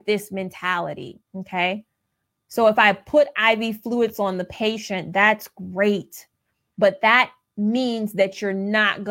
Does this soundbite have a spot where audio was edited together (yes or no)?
yes